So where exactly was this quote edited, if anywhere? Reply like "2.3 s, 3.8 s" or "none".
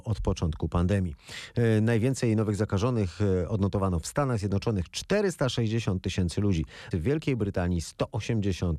6.9 s